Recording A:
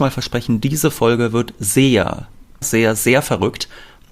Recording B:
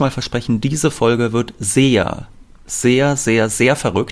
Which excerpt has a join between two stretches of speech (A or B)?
A